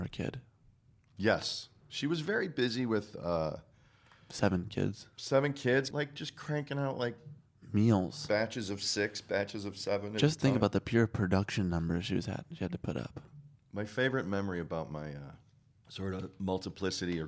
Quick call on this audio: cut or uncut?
cut